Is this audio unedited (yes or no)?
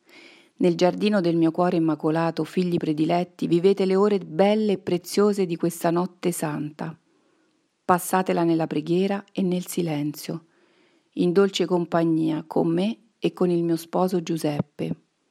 yes